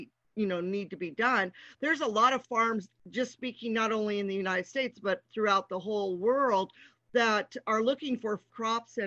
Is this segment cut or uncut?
uncut